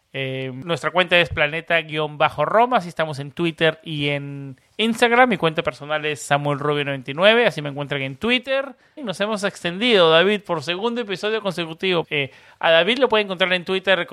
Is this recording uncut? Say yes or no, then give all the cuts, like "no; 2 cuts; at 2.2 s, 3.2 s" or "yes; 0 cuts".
no; 2 cuts; at 9.0 s, 12.0 s